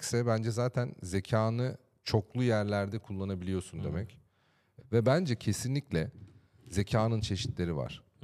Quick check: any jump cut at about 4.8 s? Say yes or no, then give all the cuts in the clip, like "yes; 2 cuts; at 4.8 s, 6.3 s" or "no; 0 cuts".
yes; 1 cut; at 4.8 s